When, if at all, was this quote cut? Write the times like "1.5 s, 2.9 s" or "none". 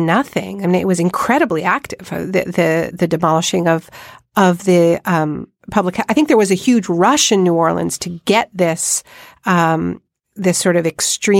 2.9 s